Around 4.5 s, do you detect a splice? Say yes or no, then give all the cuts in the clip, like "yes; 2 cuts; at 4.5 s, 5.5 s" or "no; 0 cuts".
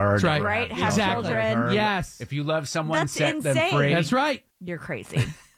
yes; 1 cut; at 4.5 s